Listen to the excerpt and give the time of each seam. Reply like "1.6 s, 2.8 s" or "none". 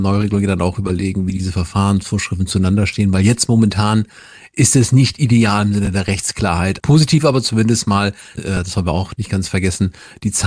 6.8 s, 8.4 s

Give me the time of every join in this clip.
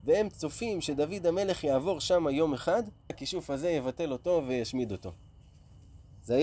3.1 s

